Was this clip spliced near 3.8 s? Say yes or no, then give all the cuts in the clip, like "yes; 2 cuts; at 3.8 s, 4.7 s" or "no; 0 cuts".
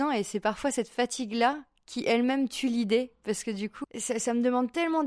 yes; 1 cut; at 3.8 s